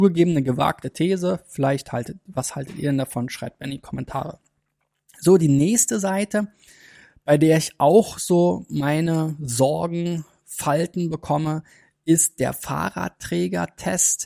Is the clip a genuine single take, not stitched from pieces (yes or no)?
yes